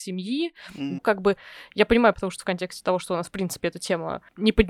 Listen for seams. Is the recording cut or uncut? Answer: cut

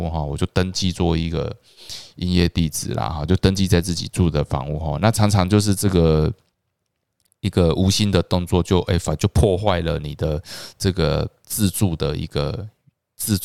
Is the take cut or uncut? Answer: uncut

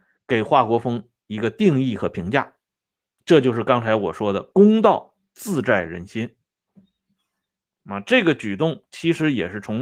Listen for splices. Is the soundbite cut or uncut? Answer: uncut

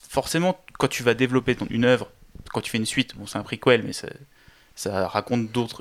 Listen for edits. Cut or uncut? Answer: uncut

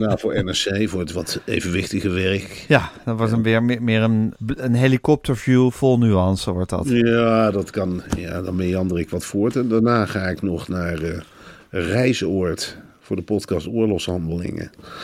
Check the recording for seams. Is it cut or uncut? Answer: cut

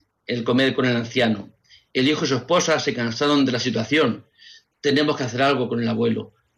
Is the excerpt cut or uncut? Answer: uncut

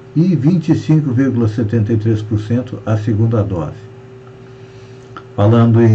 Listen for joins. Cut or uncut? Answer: uncut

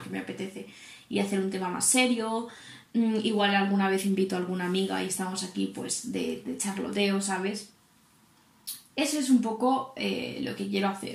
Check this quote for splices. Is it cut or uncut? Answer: uncut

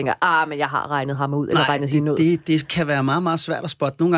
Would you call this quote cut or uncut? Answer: uncut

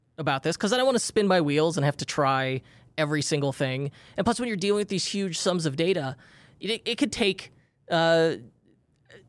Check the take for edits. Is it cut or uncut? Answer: uncut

